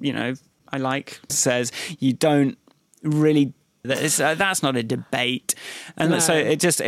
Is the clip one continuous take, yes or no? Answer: no